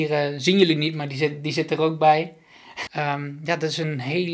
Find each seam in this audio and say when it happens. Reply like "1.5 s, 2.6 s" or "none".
2.9 s